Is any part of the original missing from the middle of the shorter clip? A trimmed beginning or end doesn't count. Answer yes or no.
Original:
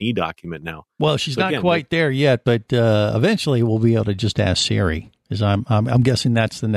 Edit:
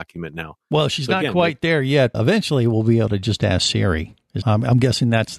yes